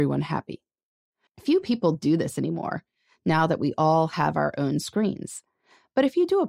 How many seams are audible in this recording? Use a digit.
1